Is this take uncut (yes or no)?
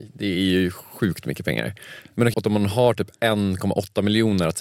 no